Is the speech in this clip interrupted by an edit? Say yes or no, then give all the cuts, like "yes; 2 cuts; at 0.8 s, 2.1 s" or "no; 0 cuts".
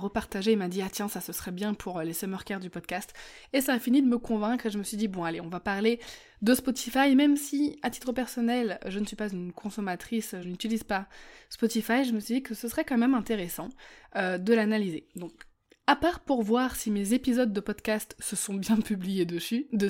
no; 0 cuts